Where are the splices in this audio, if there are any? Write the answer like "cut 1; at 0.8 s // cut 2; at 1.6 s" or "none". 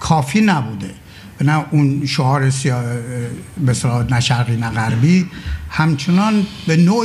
none

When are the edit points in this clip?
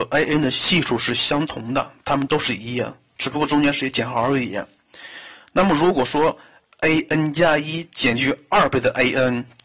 cut 1; at 2.3 s

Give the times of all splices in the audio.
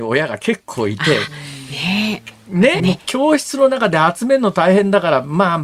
cut 1; at 2.8 s

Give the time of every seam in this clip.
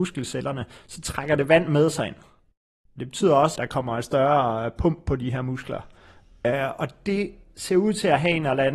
cut 1; at 3.6 s

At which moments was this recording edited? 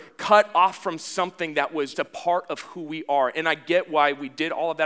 cut 1; at 1.9 s

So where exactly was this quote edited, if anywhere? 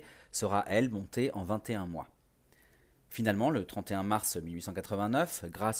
none

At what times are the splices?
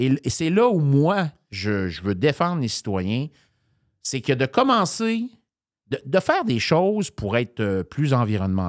none

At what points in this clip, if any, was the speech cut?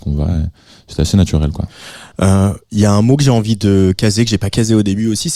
none

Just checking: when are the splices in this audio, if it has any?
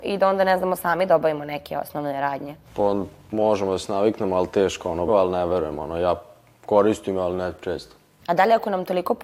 cut 1; at 2.7 s // cut 2; at 5.1 s // cut 3; at 8.2 s

